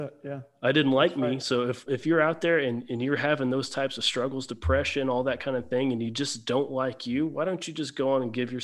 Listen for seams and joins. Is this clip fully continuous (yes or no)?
no